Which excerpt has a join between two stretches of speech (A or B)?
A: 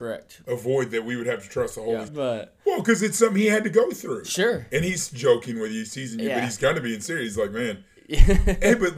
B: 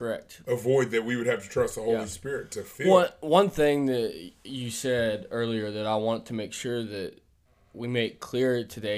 A